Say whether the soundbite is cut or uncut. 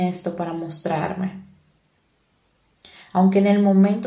uncut